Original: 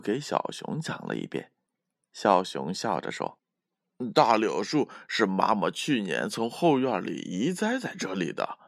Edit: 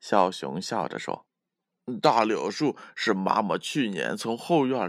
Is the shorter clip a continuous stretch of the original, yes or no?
yes